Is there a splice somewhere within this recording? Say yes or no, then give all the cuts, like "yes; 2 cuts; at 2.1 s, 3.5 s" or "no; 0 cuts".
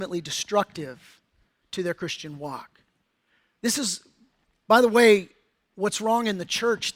no; 0 cuts